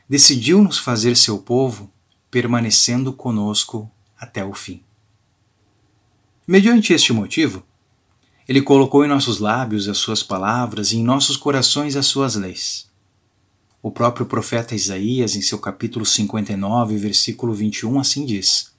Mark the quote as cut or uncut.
uncut